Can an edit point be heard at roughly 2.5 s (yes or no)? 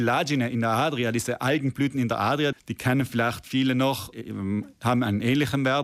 yes